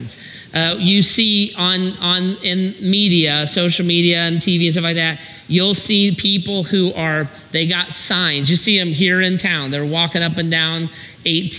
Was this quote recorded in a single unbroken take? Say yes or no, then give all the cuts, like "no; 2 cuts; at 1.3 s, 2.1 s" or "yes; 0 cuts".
yes; 0 cuts